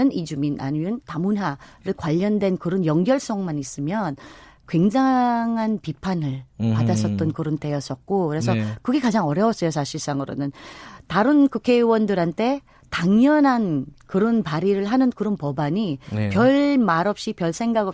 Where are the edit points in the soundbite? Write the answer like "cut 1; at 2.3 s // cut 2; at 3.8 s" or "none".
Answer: none